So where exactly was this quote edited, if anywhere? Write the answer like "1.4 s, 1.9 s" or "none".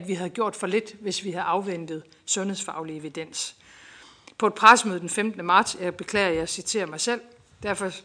none